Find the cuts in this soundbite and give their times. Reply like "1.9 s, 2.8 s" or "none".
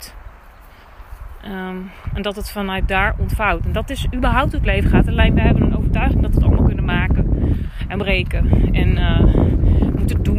none